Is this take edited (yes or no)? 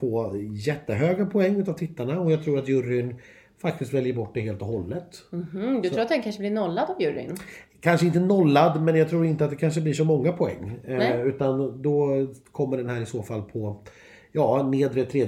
no